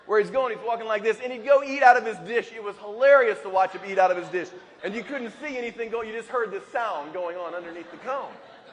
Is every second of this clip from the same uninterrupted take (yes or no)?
no